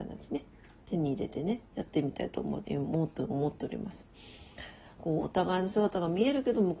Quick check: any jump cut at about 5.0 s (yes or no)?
yes